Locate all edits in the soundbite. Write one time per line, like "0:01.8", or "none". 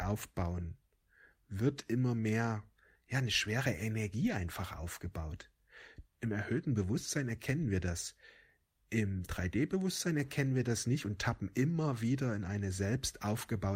0:06.0